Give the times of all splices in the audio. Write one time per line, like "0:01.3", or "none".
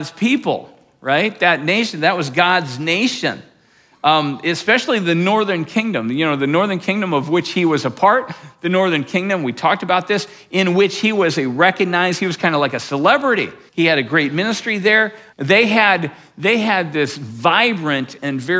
0:13.7
0:15.3